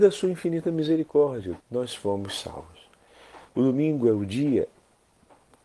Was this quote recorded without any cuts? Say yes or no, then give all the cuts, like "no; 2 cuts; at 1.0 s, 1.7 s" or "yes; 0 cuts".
no; 2 cuts; at 1.6 s, 3.5 s